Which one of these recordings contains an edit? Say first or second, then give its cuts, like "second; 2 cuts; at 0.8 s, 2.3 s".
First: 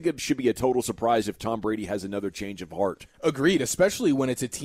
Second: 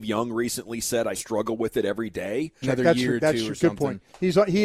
second; 2 cuts; at 1.1 s, 2.6 s